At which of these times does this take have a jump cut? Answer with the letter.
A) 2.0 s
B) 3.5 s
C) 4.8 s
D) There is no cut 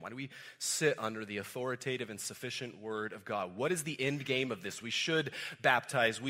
C